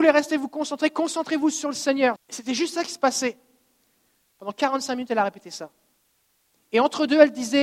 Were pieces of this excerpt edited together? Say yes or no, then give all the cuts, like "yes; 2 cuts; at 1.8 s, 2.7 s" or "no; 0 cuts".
yes; 2 cuts; at 2.2 s, 4.3 s